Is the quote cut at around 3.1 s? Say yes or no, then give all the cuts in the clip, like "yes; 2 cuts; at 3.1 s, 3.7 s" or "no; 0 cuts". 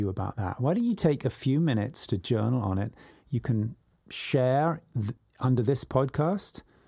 yes; 1 cut; at 3.1 s